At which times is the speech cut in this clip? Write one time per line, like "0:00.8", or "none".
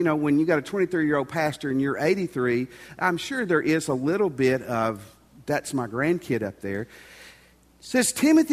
none